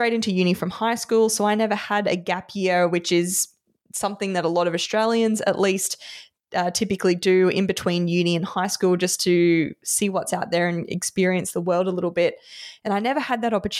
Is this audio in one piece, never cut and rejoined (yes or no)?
yes